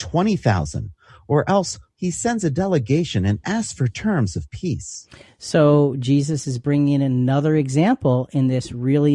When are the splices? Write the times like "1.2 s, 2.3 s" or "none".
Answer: 1.9 s